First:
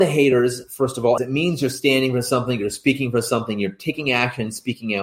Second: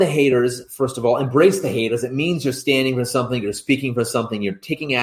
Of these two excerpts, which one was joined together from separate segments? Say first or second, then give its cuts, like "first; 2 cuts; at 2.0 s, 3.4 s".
first; 1 cut; at 1.2 s